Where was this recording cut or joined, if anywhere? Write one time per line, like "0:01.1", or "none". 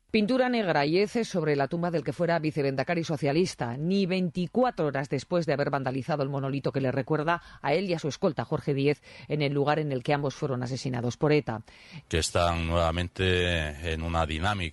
0:12.0